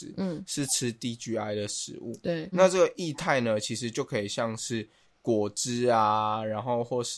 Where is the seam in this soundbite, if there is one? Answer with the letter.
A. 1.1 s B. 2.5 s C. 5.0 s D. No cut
B